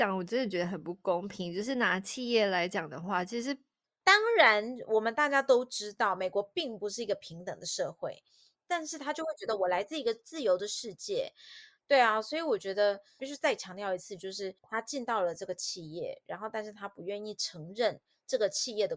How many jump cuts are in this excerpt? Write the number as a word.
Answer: two